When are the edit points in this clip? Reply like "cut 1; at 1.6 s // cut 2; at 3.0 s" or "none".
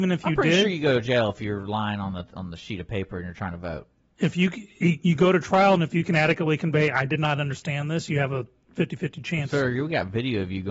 none